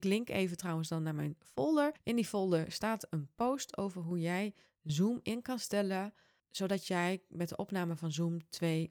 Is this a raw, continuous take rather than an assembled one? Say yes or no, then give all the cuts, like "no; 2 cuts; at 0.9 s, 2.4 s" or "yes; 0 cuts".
yes; 0 cuts